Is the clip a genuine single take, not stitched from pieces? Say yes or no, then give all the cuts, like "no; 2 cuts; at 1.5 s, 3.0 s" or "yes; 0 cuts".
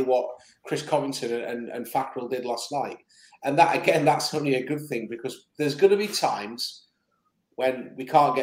yes; 0 cuts